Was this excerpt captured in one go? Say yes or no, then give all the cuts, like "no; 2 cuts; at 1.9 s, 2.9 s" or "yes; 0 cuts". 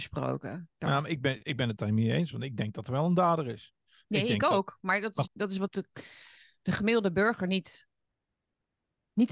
no; 1 cut; at 5.3 s